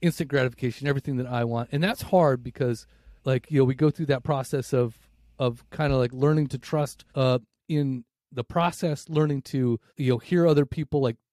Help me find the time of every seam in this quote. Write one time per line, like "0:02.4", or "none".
0:03.2
0:07.1
0:09.9